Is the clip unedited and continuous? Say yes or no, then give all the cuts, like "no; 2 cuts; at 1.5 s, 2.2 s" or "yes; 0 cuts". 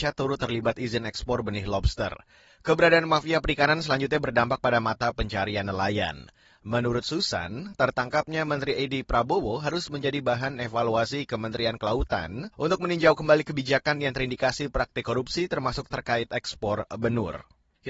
no; 1 cut; at 12.5 s